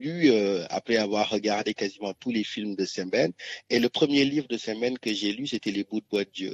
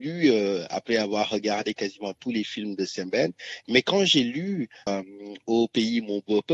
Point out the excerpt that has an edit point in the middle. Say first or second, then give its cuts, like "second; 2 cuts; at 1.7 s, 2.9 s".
second; 2 cuts; at 3.6 s, 4.9 s